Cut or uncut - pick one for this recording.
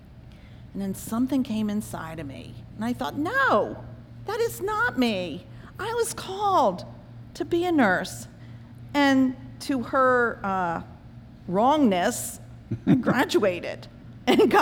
uncut